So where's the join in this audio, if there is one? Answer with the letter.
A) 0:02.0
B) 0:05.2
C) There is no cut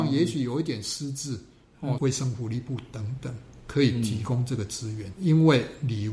A